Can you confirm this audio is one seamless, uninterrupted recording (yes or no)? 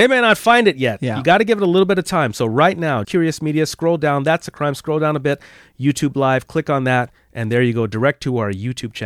no